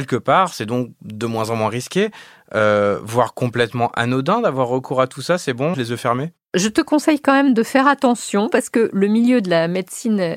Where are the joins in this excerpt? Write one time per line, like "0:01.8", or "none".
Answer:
0:05.7
0:08.5

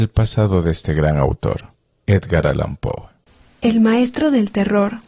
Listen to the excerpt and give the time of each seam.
none

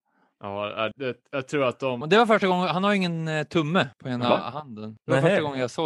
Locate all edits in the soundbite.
0:00.9
0:02.0

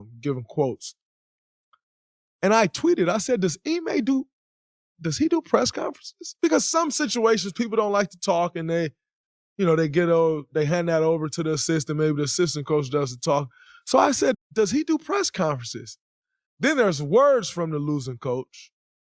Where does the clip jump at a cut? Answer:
0:14.3
0:16.4

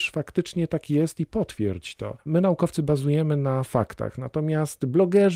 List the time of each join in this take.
0:02.2

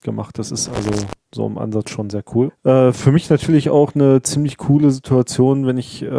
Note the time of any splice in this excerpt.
0:02.5

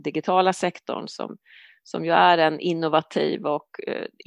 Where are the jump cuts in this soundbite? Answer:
none

